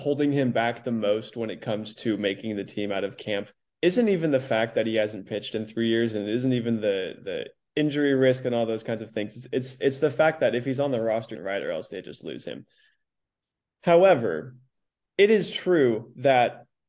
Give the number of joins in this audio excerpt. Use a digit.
1